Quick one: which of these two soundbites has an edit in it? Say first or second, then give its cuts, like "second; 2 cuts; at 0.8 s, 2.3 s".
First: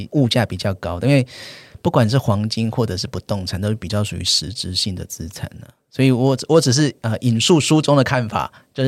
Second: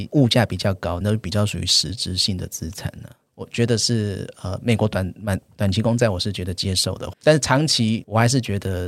second; 3 cuts; at 1.0 s, 3.3 s, 7.1 s